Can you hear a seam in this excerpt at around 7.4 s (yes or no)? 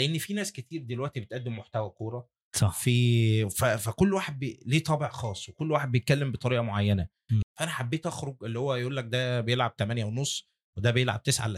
yes